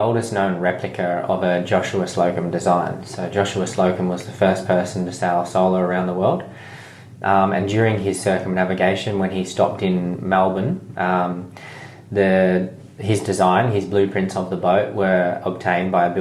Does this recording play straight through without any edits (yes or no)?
yes